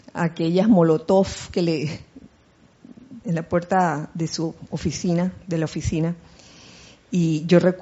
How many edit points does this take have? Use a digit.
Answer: 1